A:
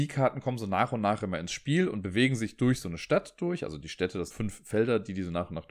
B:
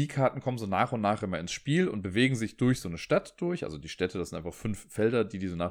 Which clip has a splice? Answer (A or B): A